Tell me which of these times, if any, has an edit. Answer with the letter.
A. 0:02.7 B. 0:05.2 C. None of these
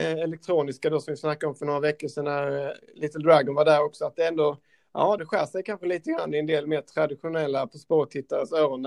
B